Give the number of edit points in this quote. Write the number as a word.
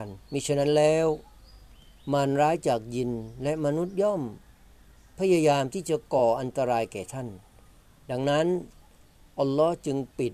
zero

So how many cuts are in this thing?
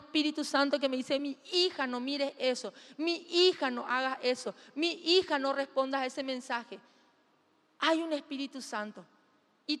zero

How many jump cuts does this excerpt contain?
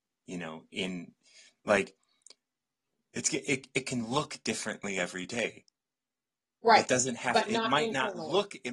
zero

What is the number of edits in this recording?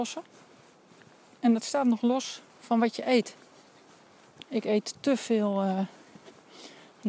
two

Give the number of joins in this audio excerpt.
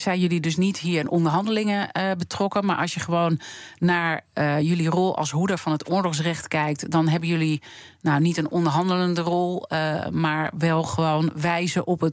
zero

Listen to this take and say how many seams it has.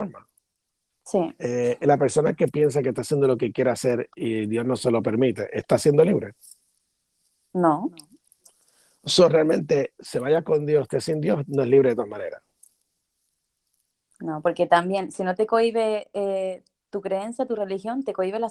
zero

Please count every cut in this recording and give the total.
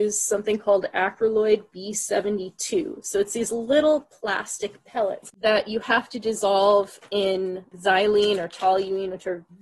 zero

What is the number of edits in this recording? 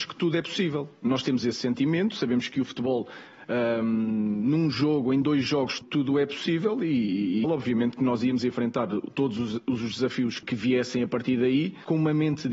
two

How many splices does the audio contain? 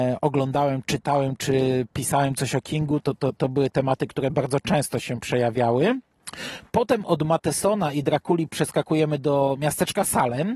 zero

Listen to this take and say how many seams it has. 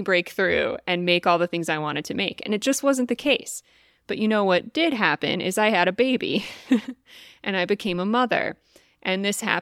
zero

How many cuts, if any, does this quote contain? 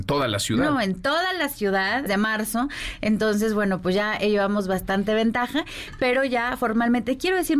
one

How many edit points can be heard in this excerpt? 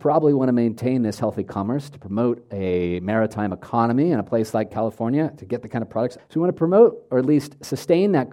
one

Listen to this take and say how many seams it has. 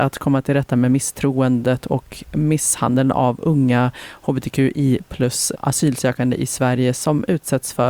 one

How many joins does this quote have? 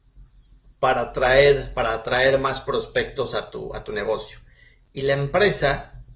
zero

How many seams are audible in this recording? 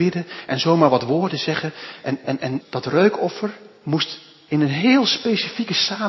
one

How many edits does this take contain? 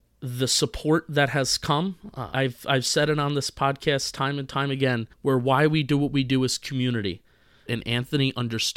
three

